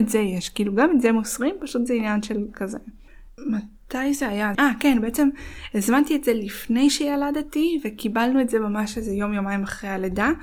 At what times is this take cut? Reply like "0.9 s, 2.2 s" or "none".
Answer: 3.4 s, 4.5 s